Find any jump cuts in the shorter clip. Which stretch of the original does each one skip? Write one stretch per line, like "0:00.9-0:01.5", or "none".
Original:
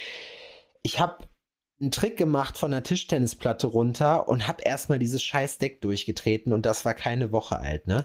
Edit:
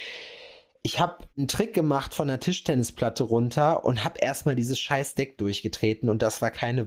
0:01.3-0:01.7